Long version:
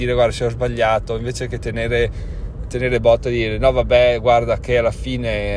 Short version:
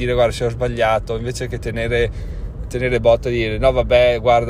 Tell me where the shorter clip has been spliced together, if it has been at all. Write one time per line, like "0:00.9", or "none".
none